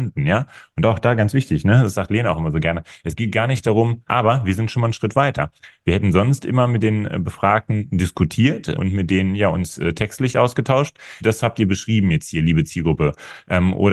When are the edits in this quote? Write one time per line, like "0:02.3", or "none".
0:04.1
0:08.7
0:11.2